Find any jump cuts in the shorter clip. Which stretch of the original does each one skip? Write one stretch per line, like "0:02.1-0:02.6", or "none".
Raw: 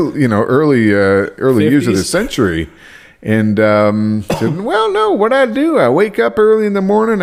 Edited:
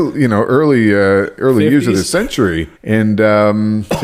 0:02.8-0:03.1